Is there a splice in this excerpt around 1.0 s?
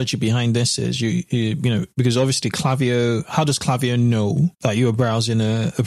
no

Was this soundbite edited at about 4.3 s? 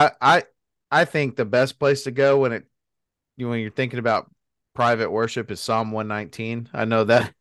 no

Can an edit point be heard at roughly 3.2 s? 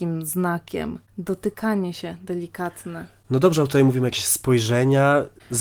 yes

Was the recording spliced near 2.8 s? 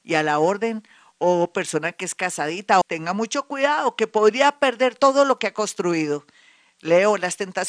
yes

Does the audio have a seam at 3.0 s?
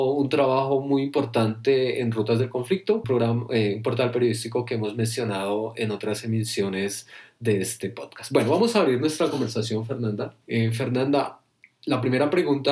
yes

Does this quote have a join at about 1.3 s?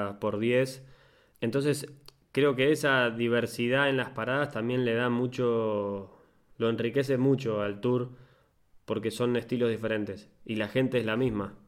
yes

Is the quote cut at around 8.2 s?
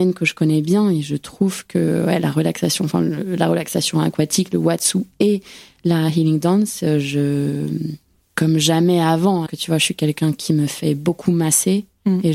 yes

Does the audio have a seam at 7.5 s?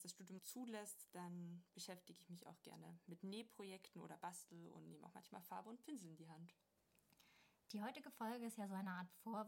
no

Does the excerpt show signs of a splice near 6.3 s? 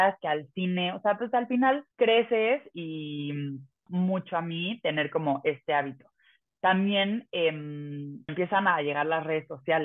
no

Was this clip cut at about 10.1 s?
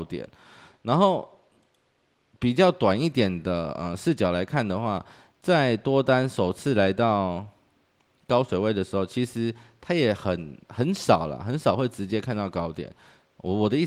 no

